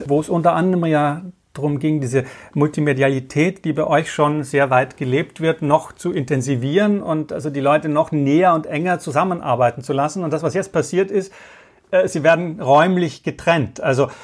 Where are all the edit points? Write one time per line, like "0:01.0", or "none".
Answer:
none